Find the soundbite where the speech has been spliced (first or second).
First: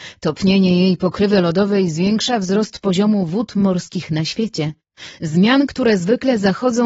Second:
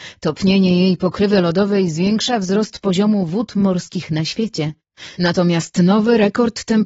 second